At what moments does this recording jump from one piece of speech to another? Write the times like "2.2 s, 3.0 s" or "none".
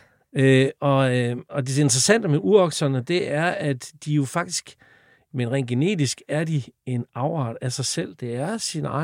1.5 s, 5.3 s